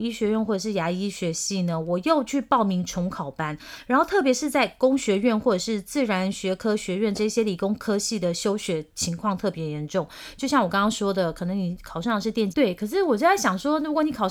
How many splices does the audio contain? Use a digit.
1